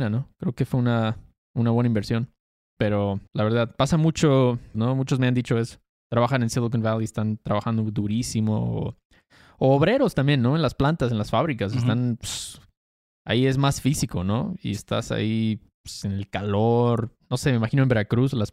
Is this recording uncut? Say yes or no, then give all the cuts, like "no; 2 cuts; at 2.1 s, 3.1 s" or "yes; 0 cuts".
no; 2 cuts; at 3.3 s, 4.7 s